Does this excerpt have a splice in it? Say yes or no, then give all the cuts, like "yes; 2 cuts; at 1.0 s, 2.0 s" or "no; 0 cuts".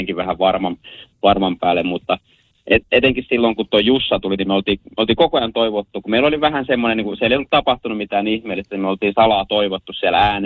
no; 0 cuts